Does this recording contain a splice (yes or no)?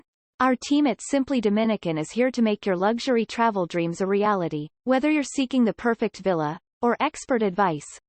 yes